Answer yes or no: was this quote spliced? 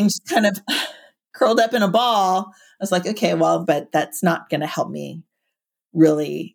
yes